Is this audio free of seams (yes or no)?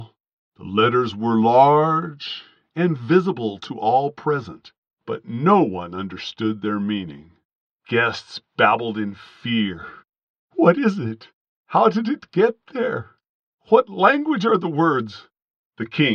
yes